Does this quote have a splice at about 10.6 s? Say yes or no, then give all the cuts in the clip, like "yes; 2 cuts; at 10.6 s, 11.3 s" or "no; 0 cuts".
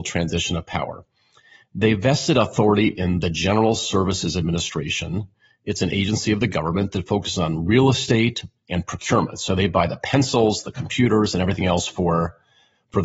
yes; 1 cut; at 10.6 s